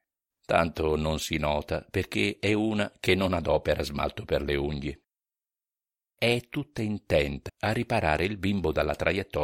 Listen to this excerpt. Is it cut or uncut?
cut